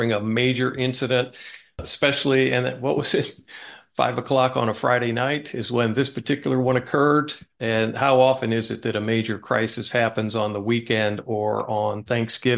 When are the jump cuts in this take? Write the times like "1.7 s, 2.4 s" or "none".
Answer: none